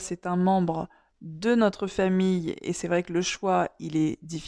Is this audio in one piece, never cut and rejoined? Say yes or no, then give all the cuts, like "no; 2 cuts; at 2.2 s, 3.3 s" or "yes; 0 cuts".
yes; 0 cuts